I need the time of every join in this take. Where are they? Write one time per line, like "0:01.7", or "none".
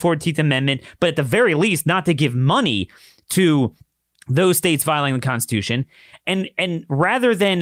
none

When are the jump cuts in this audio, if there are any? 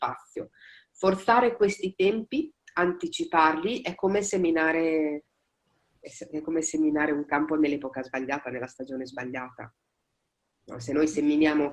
none

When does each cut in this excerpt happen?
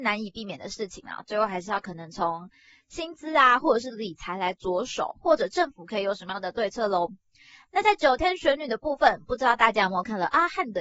none

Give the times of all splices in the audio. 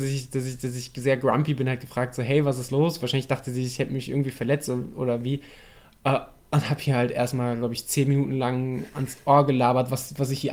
none

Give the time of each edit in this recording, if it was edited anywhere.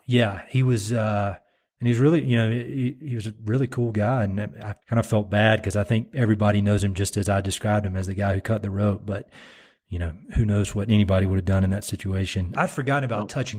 0:04.8
0:12.5

